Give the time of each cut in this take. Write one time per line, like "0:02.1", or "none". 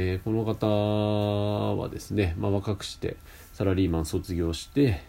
none